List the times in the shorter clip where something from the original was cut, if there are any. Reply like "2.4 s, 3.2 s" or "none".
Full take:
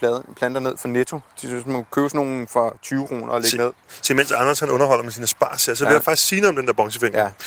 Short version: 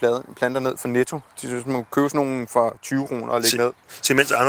none